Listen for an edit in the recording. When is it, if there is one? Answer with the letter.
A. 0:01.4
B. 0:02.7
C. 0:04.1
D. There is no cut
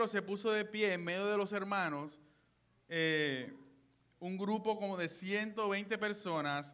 D